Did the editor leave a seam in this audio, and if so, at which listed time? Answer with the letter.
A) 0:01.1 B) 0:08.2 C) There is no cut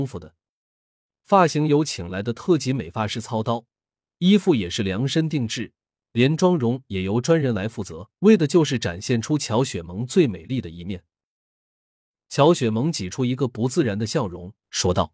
B